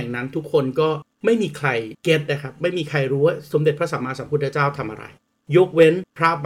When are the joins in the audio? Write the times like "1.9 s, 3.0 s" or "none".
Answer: none